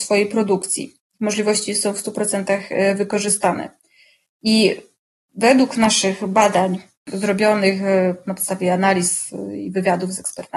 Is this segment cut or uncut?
uncut